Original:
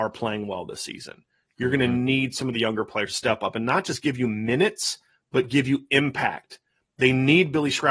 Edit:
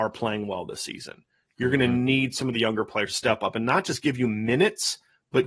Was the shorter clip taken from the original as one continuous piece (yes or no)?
yes